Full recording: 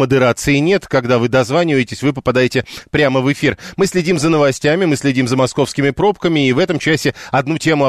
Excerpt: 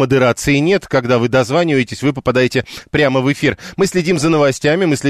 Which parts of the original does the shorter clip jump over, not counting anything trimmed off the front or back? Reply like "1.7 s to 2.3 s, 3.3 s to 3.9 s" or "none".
none